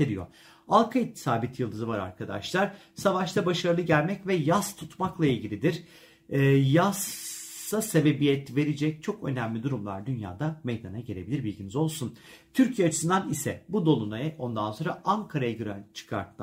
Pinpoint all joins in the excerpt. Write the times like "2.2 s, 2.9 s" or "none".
none